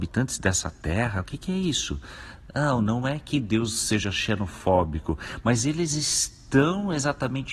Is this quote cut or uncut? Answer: uncut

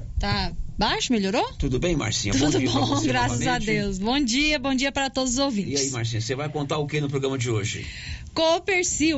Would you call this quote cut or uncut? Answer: uncut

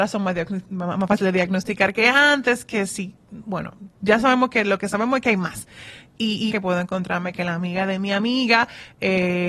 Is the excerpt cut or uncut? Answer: cut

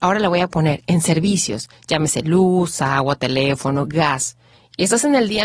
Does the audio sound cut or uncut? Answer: uncut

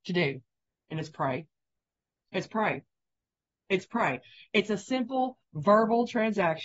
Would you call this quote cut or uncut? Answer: uncut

